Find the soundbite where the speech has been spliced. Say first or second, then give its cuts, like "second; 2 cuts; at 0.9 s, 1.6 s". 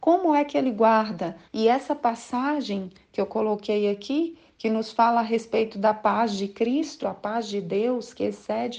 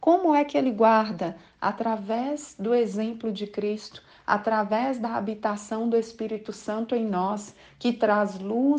first; 2 cuts; at 1.5 s, 7.0 s